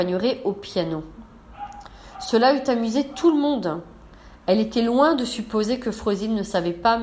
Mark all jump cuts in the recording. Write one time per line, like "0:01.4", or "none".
none